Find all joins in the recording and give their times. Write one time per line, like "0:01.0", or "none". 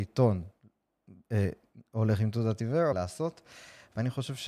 0:02.9